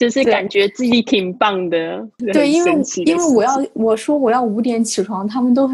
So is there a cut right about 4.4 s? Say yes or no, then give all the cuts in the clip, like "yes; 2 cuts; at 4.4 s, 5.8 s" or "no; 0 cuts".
no; 1 cut; at 2.2 s